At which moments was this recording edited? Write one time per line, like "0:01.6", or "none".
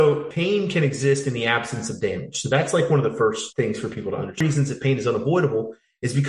none